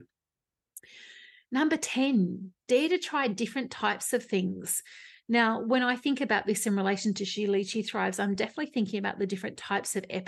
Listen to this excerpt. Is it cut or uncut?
uncut